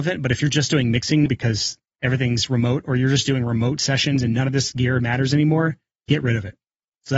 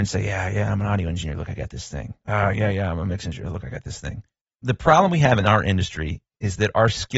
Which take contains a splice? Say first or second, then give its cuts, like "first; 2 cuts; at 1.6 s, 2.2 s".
first; 1 cut; at 1.3 s